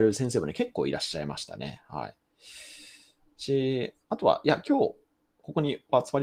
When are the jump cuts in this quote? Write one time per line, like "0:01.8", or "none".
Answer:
none